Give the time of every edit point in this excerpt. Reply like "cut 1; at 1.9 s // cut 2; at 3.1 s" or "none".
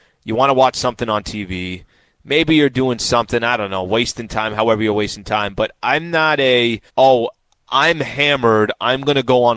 cut 1; at 6.9 s